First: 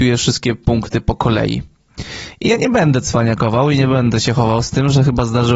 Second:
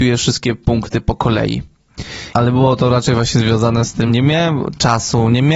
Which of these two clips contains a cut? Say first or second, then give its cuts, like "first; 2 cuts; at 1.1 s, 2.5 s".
second; 2 cuts; at 2.3 s, 4.1 s